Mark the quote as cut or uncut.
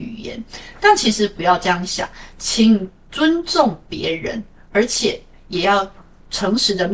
uncut